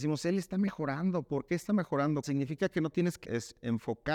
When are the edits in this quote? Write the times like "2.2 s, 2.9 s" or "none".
2.2 s, 3.2 s